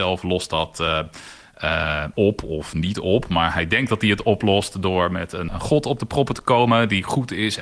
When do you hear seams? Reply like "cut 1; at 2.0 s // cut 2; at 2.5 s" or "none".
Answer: cut 1; at 2.1 s // cut 2; at 5.5 s